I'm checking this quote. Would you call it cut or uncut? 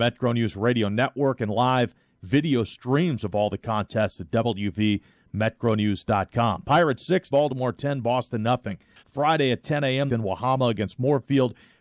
cut